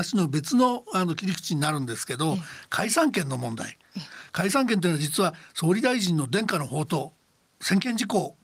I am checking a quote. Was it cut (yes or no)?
no